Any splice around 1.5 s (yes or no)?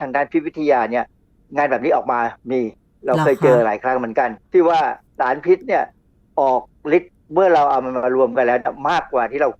no